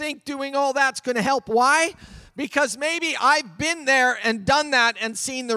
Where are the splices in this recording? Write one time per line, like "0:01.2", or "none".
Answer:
none

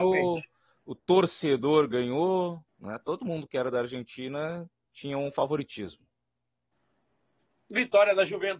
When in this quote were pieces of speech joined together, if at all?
0:02.7

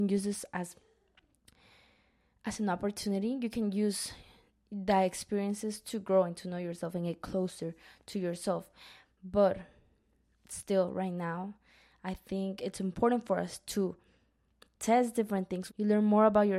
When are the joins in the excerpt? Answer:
0:15.7

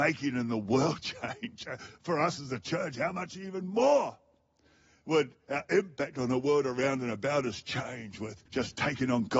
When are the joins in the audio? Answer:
0:08.5

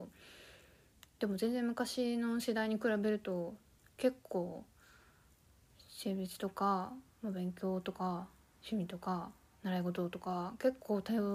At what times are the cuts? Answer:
0:01.0

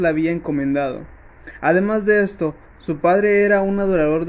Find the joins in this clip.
none

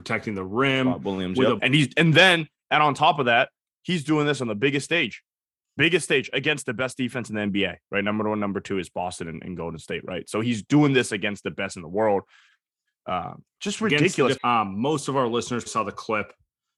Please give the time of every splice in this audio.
0:01.6
0:14.4
0:15.7

